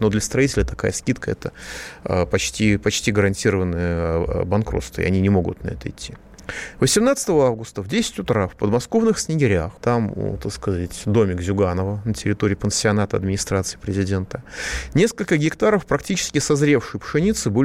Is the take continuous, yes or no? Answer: no